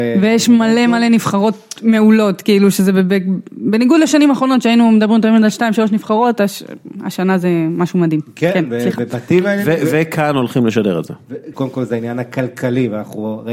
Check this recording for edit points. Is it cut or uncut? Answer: cut